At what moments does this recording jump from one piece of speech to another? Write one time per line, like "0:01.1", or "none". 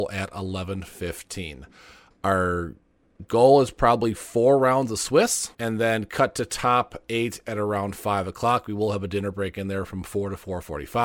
0:05.5